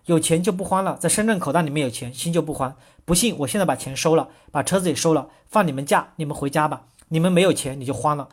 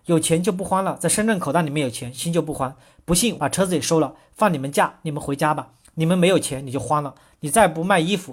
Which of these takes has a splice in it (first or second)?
second